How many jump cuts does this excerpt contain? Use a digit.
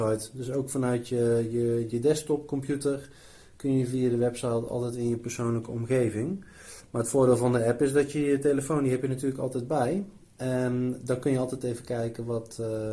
1